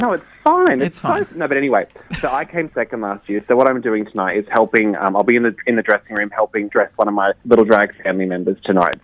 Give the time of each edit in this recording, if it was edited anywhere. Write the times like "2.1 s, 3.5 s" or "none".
6.7 s